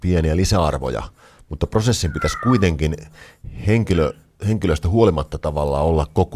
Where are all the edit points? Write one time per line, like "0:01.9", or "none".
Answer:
none